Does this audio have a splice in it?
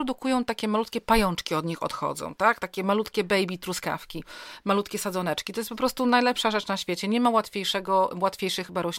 no; 0 cuts

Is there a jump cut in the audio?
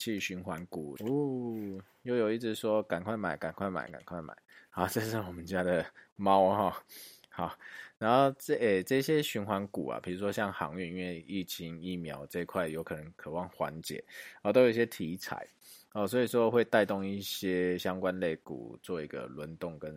yes; 1 cut; at 1.0 s

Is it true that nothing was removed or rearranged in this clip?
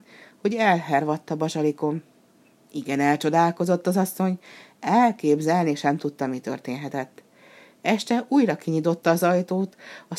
yes; 0 cuts

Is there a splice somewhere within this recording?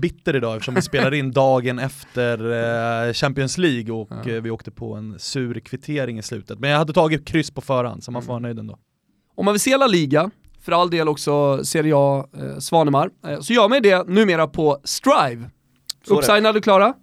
yes; 1 cut; at 15.9 s

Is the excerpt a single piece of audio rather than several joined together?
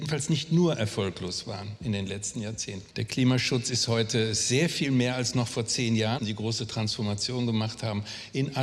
no; 2 cuts; at 2.9 s, 6.2 s

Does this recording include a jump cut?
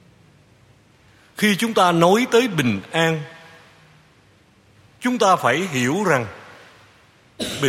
no; 0 cuts

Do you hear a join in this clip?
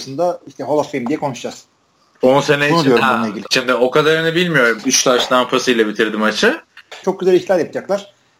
yes; 3 cuts; at 3.4 s, 4.8 s, 7.0 s

